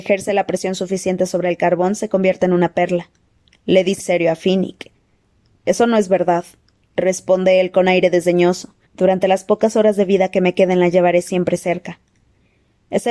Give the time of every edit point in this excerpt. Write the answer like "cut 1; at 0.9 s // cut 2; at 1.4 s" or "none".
cut 1; at 4.0 s // cut 2; at 8.9 s